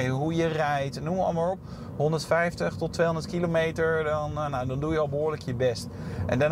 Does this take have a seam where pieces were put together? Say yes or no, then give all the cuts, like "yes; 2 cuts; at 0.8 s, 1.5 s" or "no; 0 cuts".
no; 0 cuts